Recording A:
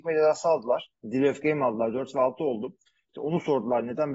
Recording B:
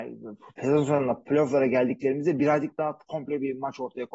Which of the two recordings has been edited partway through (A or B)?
A